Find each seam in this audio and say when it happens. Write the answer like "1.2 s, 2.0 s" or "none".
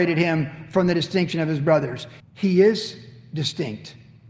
2.2 s